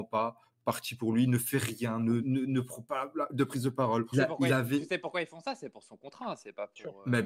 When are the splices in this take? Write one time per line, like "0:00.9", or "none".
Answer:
0:02.2
0:04.1